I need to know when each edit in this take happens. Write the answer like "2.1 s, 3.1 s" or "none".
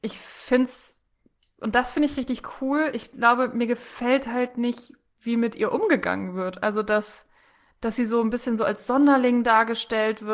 none